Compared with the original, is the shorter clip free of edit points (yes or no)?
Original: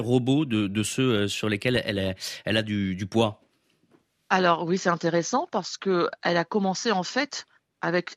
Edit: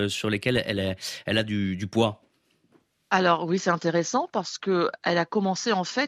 yes